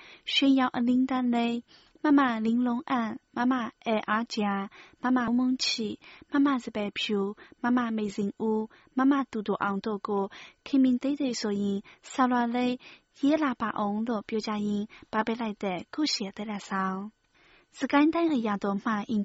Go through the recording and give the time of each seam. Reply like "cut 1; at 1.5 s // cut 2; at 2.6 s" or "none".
cut 1; at 5.3 s